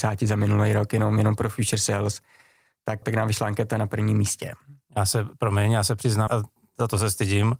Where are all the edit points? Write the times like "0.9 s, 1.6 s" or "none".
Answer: 3.0 s, 6.3 s